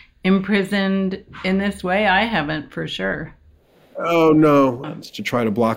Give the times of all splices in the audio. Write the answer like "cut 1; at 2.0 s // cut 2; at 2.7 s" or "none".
cut 1; at 4.8 s